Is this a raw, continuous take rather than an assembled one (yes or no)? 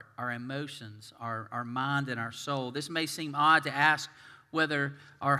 yes